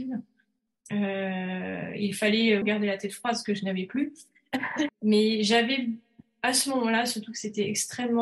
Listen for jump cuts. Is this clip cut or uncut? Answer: cut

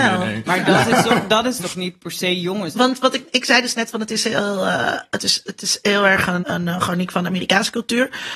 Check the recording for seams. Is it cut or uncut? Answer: cut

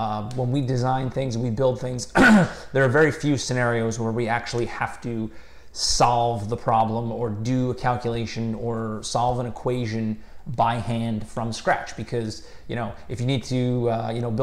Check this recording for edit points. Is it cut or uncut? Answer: uncut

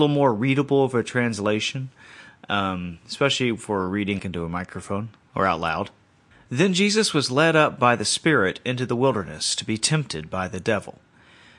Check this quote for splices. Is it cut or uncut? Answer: cut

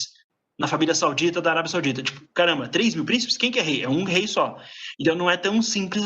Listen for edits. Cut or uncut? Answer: uncut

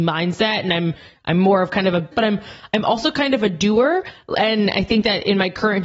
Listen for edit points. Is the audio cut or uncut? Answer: cut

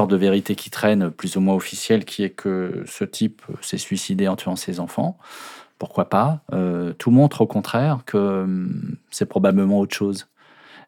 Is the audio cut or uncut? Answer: uncut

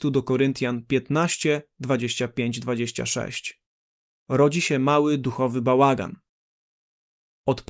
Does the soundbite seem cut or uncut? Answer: cut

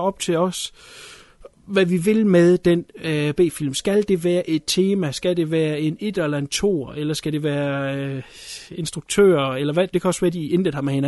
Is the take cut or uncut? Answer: cut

